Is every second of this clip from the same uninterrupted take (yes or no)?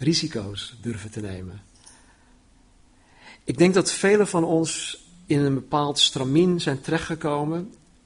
yes